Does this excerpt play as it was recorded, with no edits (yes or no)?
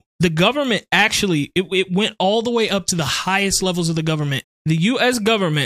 no